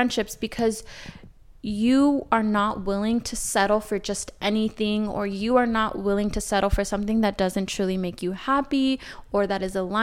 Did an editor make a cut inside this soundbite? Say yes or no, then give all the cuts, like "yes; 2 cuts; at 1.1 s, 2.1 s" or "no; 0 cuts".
no; 0 cuts